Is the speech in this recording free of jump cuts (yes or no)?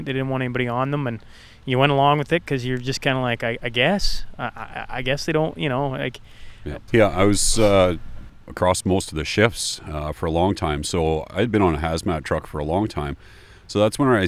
no